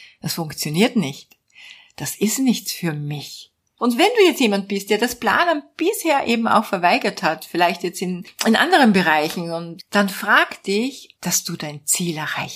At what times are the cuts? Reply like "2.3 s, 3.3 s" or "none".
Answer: 3.8 s, 9.8 s, 11.1 s